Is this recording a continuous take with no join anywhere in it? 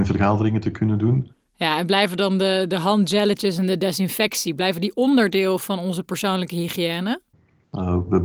yes; 0 cuts

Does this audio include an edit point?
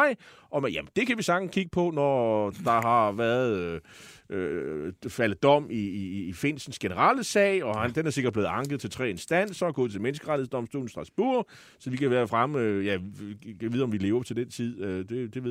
no; 0 cuts

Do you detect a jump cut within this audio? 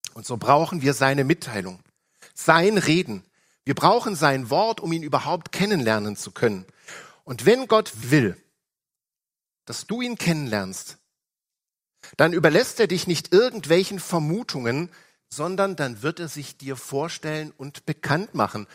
yes; 1 cut; at 8.0 s

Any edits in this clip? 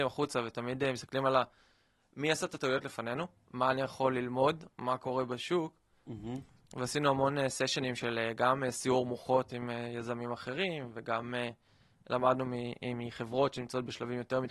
no; 0 cuts

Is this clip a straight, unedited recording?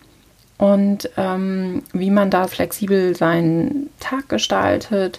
no; 1 cut; at 2.5 s

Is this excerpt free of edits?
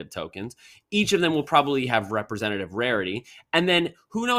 yes; 0 cuts

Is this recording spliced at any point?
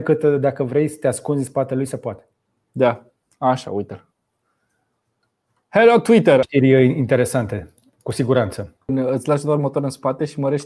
yes; 2 cuts; at 6.4 s, 8.9 s

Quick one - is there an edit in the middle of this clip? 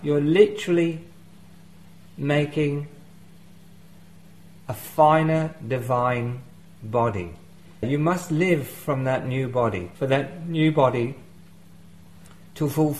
yes; 2 cuts; at 7.8 s, 10.0 s

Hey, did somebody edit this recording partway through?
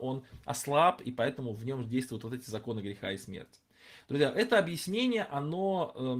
no; 0 cuts

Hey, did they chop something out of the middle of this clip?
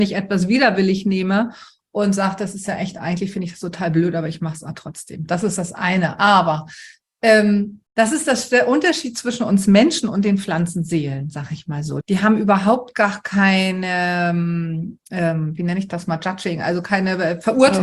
yes; 2 cuts; at 7.9 s, 12.0 s

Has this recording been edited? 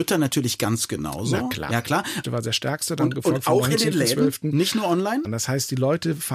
yes; 2 cuts; at 2.2 s, 5.2 s

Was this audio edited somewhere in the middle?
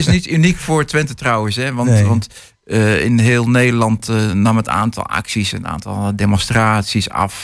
no; 0 cuts

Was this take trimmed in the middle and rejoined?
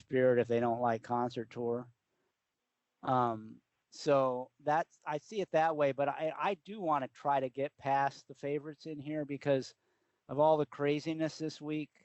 no; 0 cuts

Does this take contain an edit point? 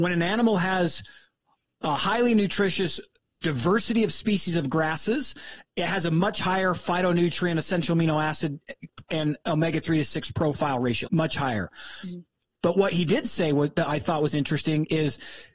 yes; 2 cuts; at 9.1 s, 11.1 s

